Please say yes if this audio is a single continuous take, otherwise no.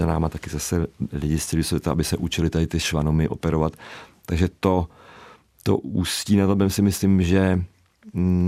yes